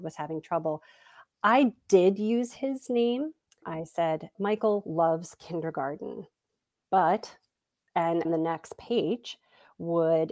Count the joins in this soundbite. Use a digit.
2